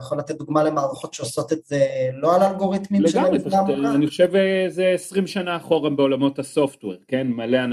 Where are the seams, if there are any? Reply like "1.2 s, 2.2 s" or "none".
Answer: none